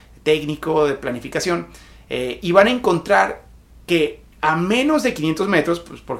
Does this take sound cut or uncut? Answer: uncut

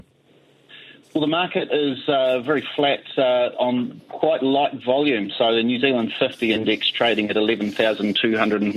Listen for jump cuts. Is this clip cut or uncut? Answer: uncut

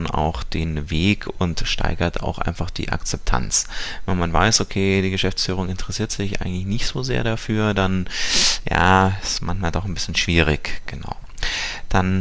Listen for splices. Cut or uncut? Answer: uncut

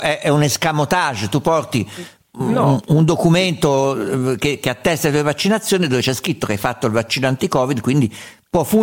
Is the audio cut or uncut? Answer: uncut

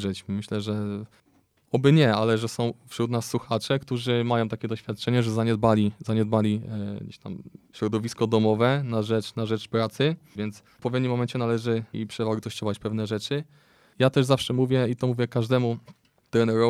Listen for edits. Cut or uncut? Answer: cut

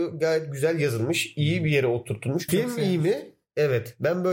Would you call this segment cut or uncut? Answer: cut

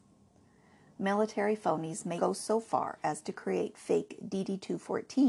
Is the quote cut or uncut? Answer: cut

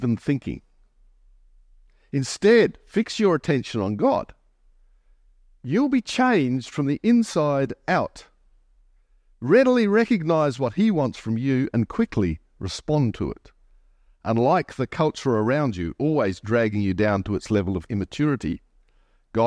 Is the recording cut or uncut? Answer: uncut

